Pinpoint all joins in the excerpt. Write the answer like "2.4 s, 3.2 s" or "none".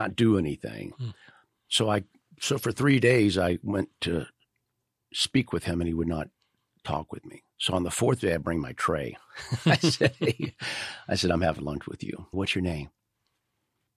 7.5 s, 12.3 s